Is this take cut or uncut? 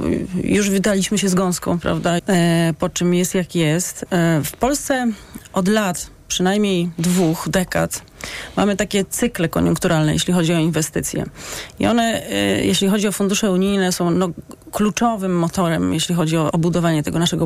cut